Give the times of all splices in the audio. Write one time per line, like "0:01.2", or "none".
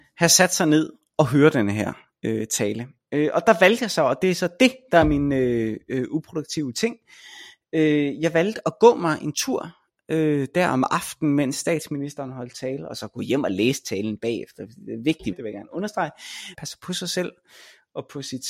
0:15.3
0:16.5